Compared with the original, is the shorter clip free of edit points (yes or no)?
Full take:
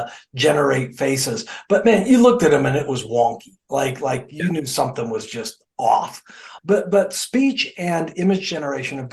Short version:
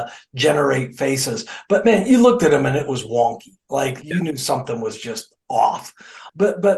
no